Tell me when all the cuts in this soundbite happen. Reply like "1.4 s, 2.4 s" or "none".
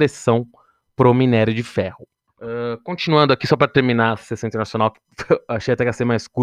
2.3 s